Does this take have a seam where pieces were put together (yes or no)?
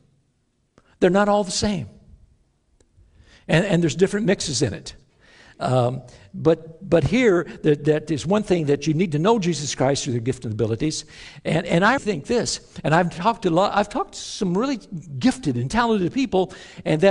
yes